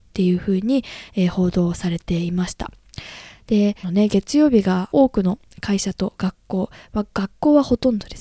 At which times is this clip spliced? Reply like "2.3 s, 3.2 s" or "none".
3.8 s, 4.9 s